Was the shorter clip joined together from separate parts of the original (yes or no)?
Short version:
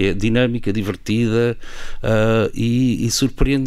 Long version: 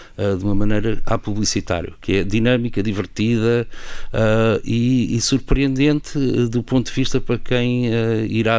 no